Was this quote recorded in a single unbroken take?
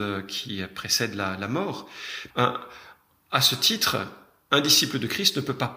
no; 1 cut; at 2.3 s

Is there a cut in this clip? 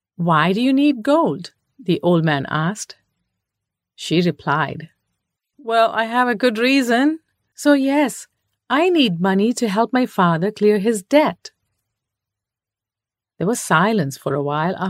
yes; 1 cut; at 7.5 s

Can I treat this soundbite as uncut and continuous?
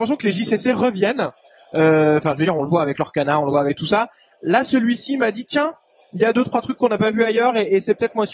yes; 0 cuts

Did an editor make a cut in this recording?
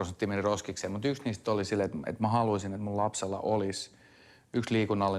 no; 0 cuts

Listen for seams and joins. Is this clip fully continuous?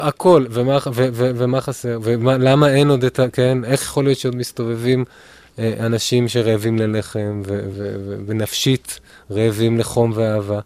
no; 1 cut; at 7.7 s

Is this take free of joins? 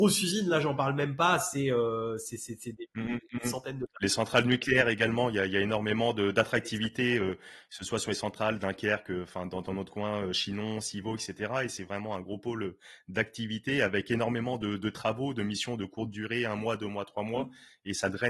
yes; 0 cuts

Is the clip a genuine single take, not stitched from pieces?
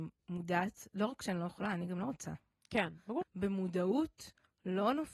no; 1 cut; at 3.2 s

